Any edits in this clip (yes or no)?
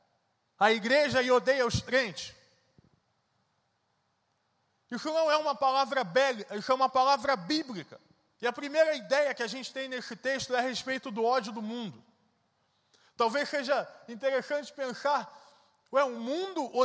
yes